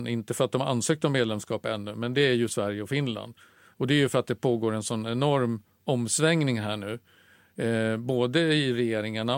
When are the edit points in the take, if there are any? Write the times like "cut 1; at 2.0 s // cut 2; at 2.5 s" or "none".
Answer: none